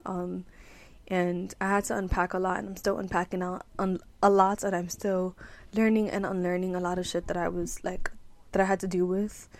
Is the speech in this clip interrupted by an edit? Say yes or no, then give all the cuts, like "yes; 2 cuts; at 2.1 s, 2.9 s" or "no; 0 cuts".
no; 0 cuts